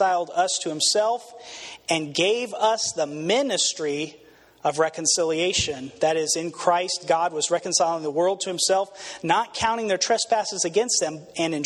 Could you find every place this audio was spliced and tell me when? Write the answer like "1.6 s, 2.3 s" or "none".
none

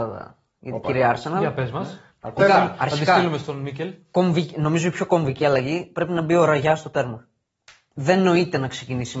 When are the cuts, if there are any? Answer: 2.4 s

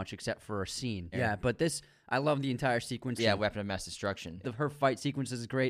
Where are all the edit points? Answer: 1.1 s, 3.2 s, 4.4 s

